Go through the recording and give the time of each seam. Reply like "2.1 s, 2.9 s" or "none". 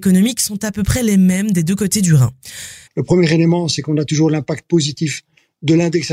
2.9 s